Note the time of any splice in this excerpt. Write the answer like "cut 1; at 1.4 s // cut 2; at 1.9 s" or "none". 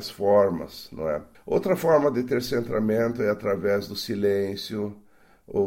cut 1; at 1.3 s